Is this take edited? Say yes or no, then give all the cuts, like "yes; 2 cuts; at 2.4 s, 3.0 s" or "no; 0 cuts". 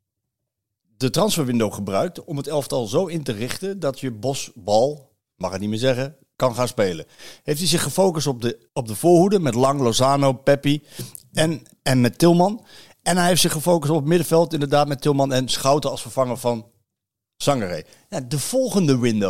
yes; 1 cut; at 8.7 s